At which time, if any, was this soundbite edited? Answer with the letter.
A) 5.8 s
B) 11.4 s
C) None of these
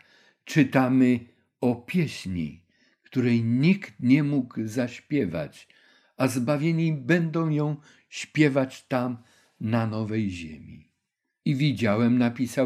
C